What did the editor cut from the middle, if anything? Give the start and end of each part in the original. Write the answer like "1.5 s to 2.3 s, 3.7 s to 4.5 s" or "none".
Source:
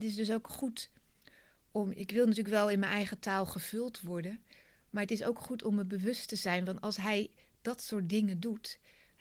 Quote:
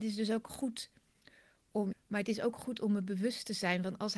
1.9 s to 4.8 s